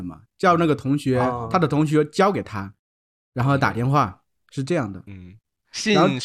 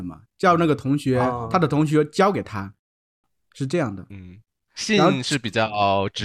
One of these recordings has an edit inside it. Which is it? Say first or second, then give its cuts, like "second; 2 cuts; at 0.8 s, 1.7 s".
second; 1 cut; at 3.2 s